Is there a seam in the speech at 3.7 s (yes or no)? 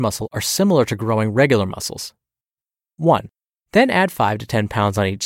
yes